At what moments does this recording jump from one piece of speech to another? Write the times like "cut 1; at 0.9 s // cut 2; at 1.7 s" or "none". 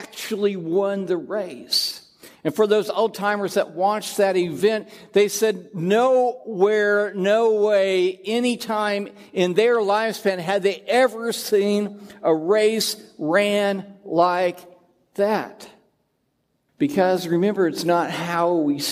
cut 1; at 16.7 s

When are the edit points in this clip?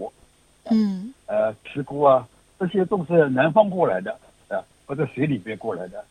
cut 1; at 1.1 s

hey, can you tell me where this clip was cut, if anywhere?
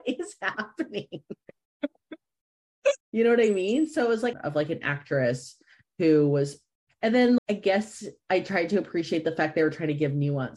cut 1; at 3.0 s // cut 2; at 4.3 s // cut 3; at 7.4 s

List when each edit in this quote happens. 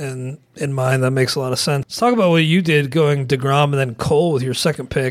cut 1; at 1.8 s

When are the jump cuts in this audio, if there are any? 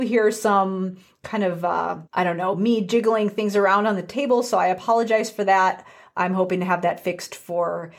cut 1; at 2.1 s

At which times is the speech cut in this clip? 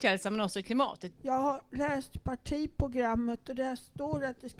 cut 1; at 1.1 s

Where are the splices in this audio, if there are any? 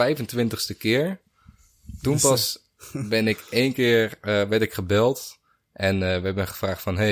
none

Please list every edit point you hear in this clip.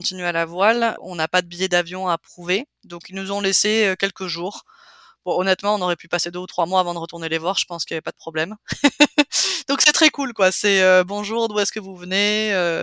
cut 1; at 1.0 s

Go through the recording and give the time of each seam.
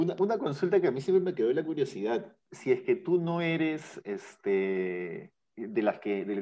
none

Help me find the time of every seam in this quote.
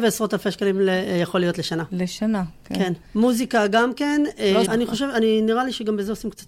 cut 1; at 3.0 s // cut 2; at 4.7 s

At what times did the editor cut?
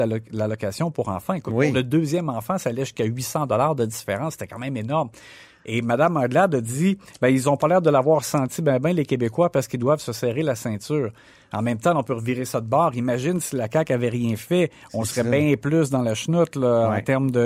none

